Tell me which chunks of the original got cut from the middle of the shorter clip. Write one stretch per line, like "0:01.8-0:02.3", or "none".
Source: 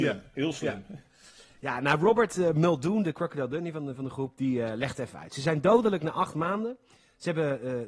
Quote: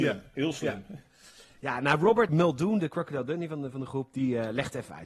0:02.3-0:02.5